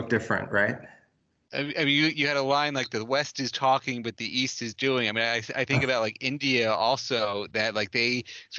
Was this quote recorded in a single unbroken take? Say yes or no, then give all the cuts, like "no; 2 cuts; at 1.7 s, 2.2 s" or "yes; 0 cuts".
yes; 0 cuts